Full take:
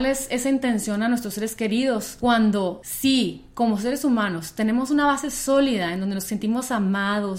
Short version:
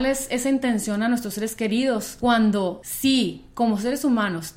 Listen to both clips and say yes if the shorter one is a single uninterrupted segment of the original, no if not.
yes